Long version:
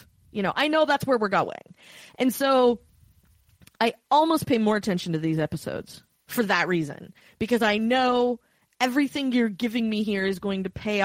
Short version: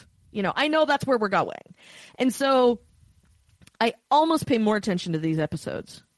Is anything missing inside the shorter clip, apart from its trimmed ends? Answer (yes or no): no